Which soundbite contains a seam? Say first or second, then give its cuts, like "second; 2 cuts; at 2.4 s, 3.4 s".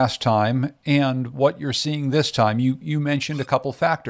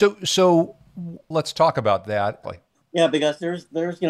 second; 2 cuts; at 1.3 s, 2.4 s